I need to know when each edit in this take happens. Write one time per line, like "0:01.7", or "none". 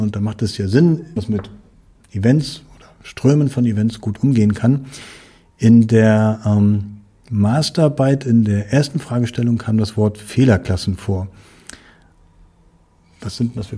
0:01.2